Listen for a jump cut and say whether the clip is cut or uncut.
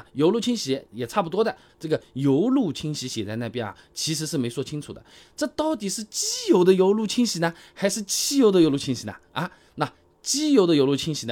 cut